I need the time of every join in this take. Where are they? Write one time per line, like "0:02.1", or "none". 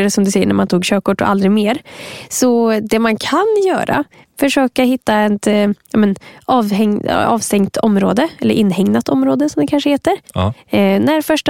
none